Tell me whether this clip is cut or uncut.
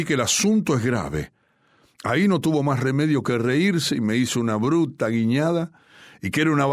uncut